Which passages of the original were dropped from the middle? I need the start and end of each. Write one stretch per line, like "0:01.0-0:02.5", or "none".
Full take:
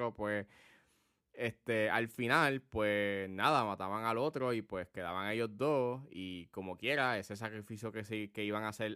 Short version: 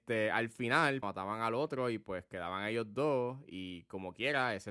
0:02.6-0:03.7